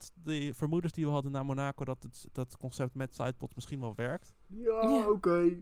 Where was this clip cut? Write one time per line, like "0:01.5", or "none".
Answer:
0:04.5

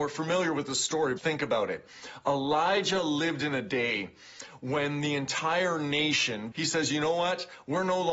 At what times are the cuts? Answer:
0:01.2
0:06.5

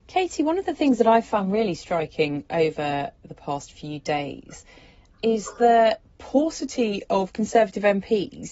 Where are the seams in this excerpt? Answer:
none

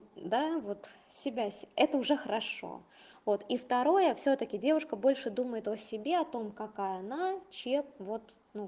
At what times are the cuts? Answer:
none

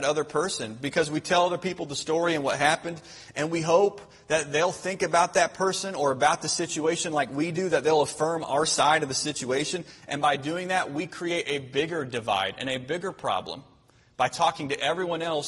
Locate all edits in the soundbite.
none

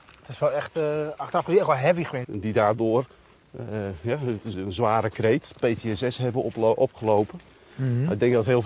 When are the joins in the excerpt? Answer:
0:02.2
0:04.5

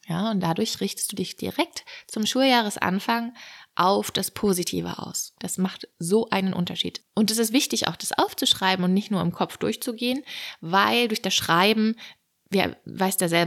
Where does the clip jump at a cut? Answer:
0:05.3
0:07.0

